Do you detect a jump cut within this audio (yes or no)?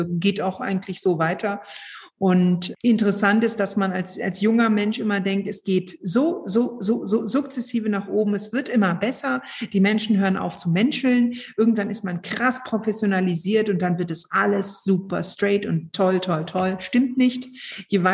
no